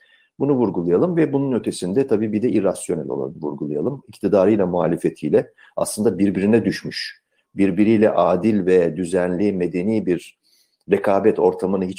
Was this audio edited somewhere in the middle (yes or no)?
no